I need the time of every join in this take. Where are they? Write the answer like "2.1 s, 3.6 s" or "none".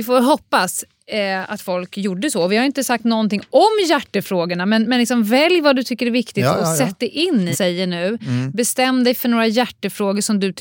7.5 s